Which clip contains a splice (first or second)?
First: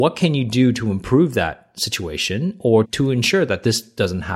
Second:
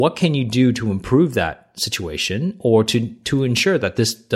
first